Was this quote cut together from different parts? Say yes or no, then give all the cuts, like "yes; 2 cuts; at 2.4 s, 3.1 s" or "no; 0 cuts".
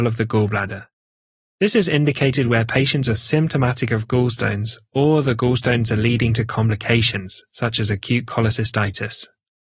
no; 0 cuts